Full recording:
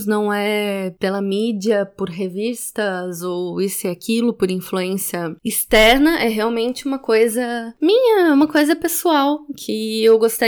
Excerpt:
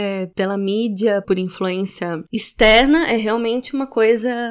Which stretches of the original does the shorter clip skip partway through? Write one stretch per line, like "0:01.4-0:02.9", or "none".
0:01.9-0:04.3